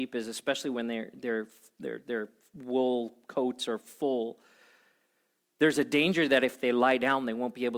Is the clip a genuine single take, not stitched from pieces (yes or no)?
yes